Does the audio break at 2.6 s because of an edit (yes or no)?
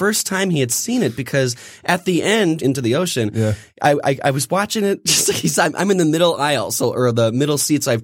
yes